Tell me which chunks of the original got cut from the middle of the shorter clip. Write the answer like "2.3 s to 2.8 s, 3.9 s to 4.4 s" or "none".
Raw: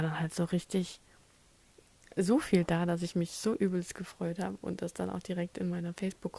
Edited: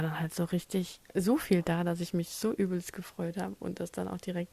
1.0 s to 2.1 s